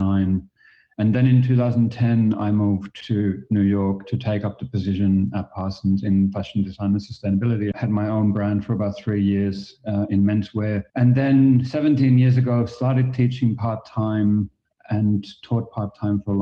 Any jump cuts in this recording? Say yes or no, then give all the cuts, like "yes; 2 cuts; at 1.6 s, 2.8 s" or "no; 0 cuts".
yes; 2 cuts; at 7.7 s, 10.9 s